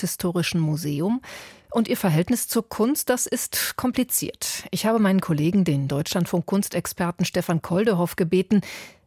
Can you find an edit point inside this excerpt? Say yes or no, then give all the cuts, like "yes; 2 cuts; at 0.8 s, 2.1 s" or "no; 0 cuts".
no; 0 cuts